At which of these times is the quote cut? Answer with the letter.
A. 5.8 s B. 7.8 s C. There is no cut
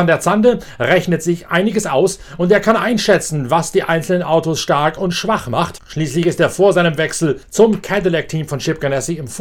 C